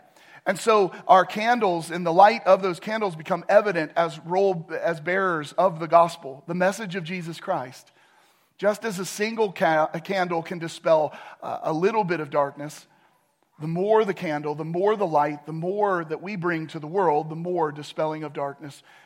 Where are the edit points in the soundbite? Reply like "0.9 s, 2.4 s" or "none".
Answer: none